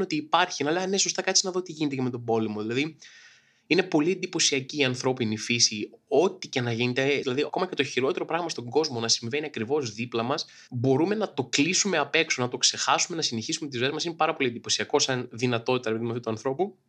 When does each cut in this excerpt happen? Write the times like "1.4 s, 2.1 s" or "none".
7.2 s